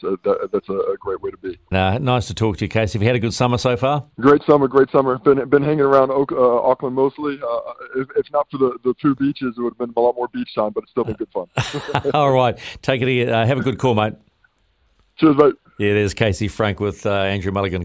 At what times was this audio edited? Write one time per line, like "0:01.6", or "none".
0:01.7
0:04.1